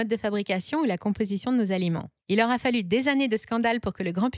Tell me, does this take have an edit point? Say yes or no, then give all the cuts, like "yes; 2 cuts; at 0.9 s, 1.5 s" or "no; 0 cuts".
yes; 1 cut; at 2.2 s